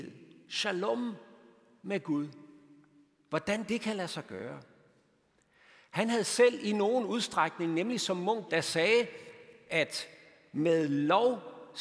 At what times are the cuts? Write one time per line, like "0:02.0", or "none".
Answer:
0:08.5